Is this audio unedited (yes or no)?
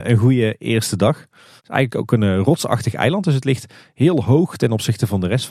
no